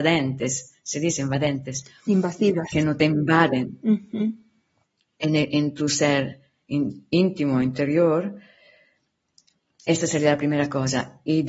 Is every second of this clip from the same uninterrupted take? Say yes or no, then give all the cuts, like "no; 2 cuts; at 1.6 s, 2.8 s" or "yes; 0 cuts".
yes; 0 cuts